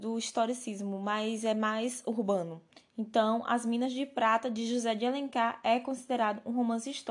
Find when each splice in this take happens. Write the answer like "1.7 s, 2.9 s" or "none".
none

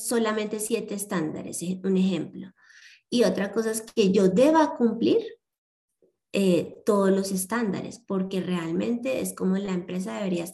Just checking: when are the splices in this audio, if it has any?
none

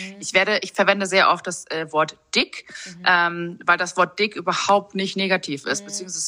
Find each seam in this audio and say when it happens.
none

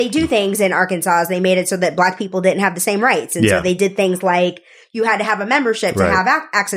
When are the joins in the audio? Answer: none

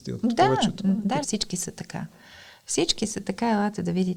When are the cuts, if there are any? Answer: 1.2 s

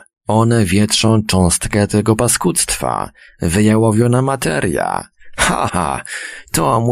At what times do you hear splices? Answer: 5.7 s

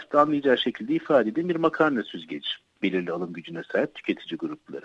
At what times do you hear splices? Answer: 2.8 s

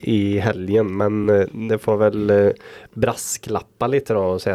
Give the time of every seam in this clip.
none

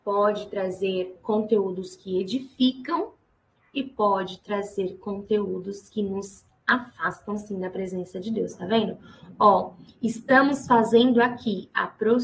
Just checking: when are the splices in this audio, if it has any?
none

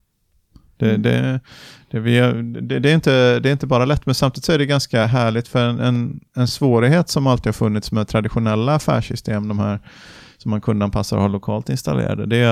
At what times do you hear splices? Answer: none

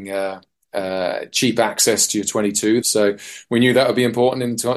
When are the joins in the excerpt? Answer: 2.8 s

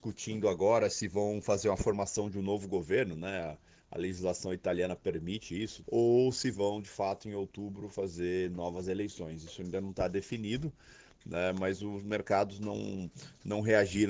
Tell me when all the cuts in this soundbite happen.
5.8 s

